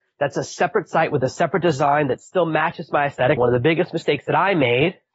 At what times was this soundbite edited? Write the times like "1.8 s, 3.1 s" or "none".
3.4 s